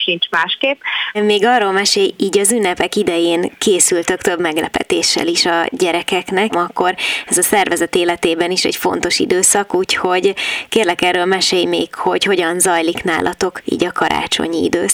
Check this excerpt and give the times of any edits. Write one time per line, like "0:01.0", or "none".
0:01.1
0:06.5